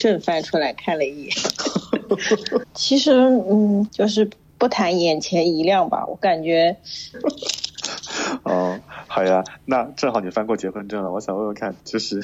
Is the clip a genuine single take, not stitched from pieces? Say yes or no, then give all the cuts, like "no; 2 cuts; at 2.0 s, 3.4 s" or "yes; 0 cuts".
no; 3 cuts; at 2.6 s, 3.9 s, 7.1 s